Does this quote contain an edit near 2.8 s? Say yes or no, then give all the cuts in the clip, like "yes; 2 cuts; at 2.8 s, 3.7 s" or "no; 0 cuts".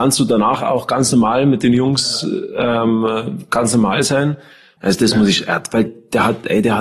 no; 2 cuts; at 4.8 s, 5.9 s